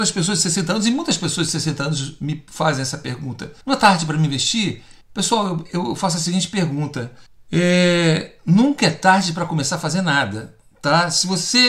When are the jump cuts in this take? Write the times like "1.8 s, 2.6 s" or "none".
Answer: 3.6 s